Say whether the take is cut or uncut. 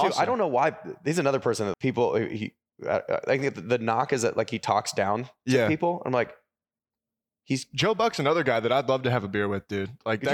cut